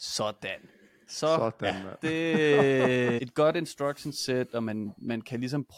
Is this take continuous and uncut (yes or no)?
no